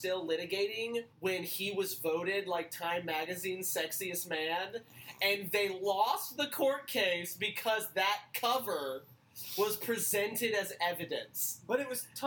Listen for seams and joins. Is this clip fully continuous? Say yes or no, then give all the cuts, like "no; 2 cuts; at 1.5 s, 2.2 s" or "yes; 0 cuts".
no; 1 cut; at 1.1 s